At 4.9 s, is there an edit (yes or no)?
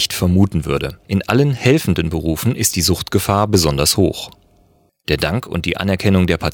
no